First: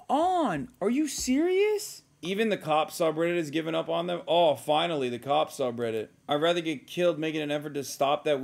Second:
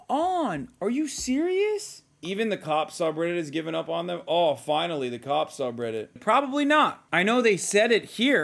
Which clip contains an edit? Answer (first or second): second